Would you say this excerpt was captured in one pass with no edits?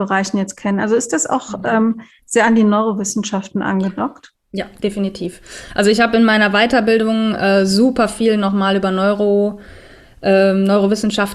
yes; 0 cuts

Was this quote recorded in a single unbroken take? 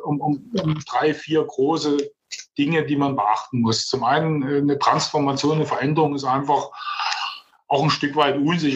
yes; 0 cuts

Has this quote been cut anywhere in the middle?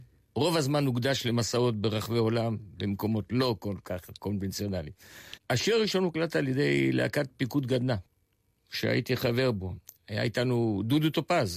yes; 1 cut; at 5.4 s

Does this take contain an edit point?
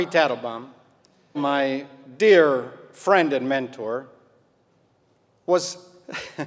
yes; 1 cut; at 1.3 s

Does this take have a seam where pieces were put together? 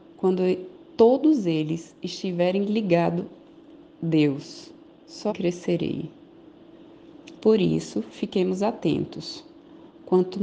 yes; 2 cuts; at 5.3 s, 7.3 s

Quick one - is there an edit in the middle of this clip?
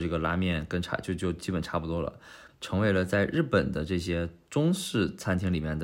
yes; 1 cut; at 2.5 s

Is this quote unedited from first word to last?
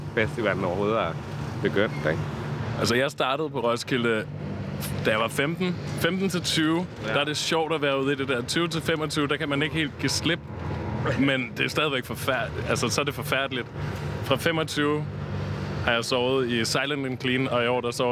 yes; 0 cuts

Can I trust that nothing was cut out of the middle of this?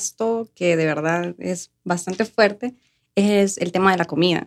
yes; 0 cuts

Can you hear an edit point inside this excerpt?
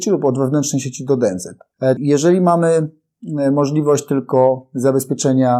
yes; 1 cut; at 2.0 s

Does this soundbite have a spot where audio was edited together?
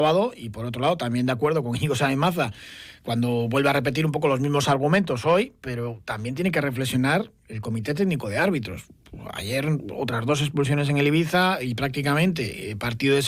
no; 0 cuts

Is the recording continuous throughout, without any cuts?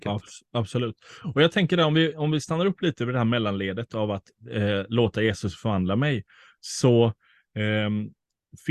yes; 0 cuts

